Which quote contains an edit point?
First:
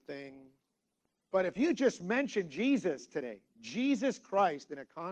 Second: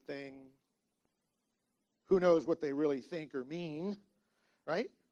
first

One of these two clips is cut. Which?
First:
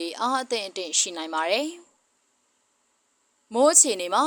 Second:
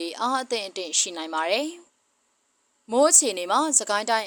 second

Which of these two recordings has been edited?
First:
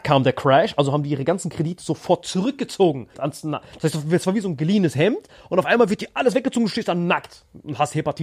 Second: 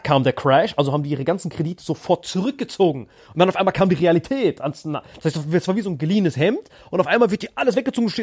first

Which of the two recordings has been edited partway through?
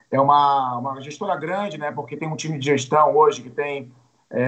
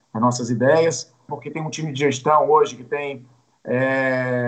second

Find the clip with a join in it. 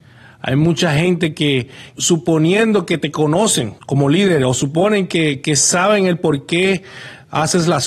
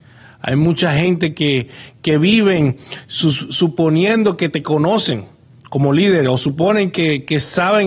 first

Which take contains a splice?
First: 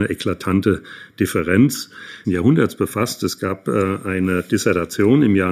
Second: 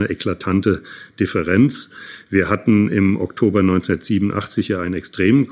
first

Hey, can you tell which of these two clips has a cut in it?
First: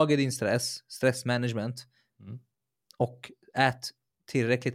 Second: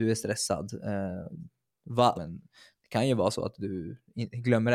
second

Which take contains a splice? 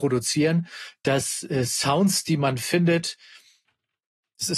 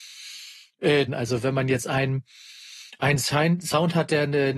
second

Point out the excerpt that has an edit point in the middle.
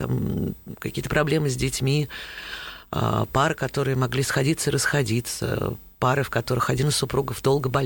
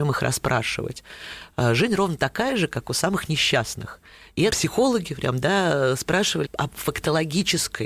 second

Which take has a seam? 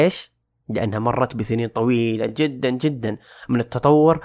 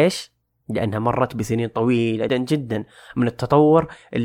second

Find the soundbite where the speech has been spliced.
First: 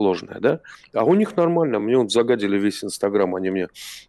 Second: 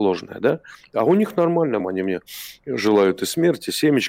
second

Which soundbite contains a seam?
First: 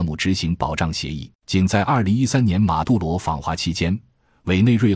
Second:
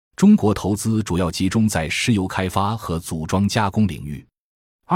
first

